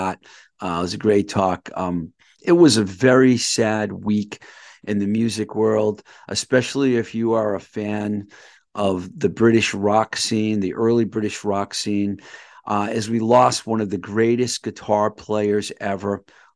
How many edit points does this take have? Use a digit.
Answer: 1